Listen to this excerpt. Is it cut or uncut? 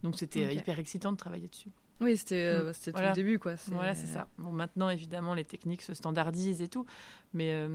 uncut